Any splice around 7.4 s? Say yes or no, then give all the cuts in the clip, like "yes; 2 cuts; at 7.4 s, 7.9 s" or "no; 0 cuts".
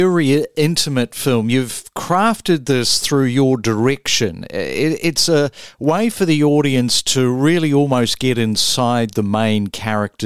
no; 0 cuts